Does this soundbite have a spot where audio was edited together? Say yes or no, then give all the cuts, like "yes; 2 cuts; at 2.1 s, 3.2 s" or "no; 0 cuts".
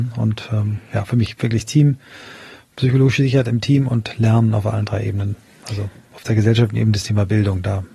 no; 0 cuts